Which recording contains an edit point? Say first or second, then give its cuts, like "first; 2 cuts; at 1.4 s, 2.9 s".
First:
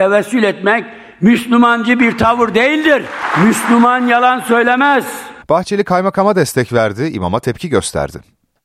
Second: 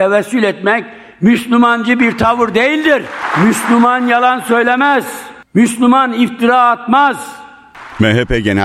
first; 1 cut; at 5.4 s